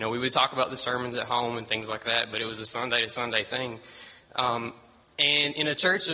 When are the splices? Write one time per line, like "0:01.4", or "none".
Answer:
none